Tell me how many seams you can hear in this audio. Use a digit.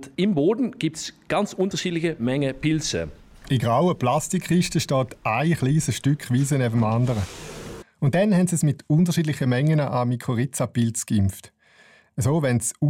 1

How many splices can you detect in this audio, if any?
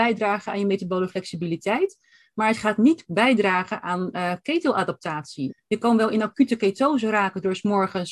1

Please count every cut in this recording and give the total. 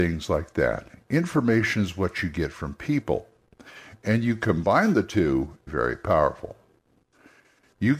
1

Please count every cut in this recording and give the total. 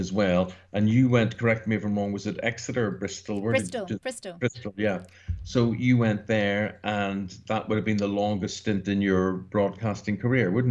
0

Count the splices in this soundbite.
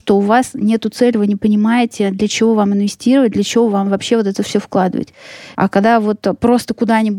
1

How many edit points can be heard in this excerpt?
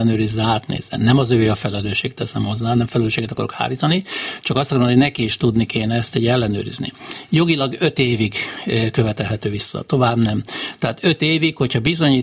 0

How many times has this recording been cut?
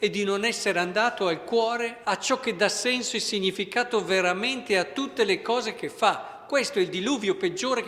1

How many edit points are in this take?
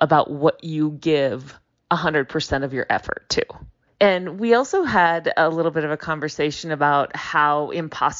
1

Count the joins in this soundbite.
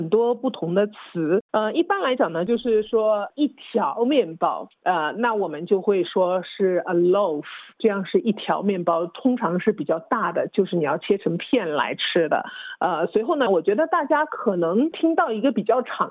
1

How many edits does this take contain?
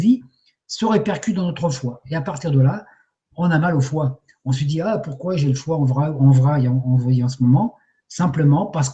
0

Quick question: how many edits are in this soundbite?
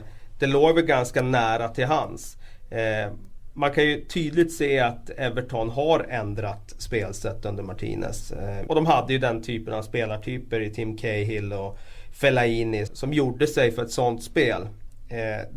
2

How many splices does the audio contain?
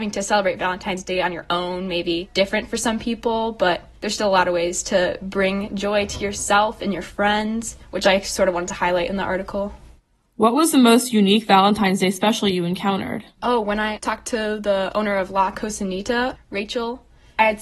0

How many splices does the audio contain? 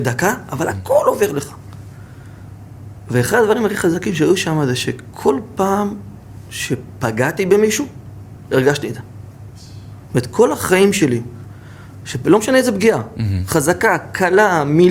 0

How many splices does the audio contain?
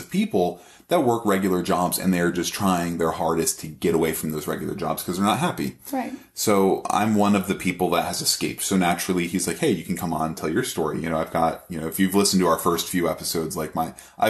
0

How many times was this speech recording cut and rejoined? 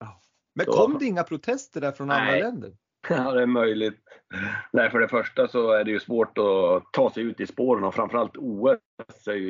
1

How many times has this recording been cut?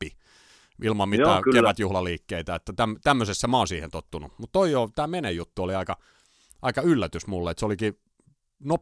0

